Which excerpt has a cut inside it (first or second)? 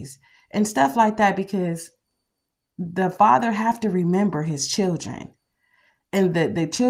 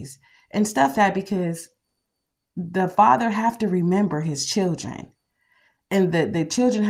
second